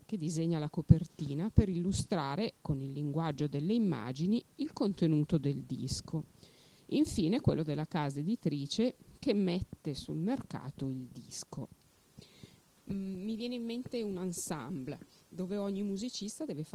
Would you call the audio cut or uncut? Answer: cut